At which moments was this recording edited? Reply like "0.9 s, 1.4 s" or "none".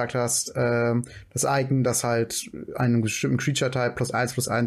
none